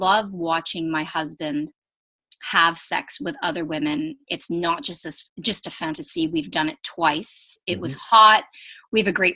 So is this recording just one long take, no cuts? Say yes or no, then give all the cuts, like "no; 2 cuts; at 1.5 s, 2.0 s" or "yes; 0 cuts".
yes; 0 cuts